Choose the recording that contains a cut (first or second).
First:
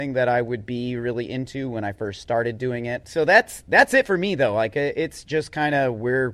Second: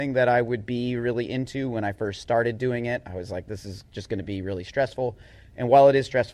first